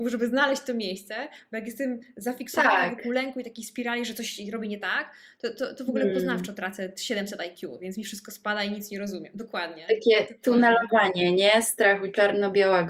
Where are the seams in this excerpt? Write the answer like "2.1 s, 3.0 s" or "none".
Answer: none